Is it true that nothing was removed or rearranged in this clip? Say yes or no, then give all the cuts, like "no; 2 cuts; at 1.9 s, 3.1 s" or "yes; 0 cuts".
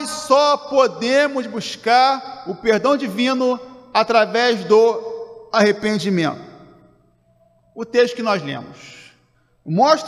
yes; 0 cuts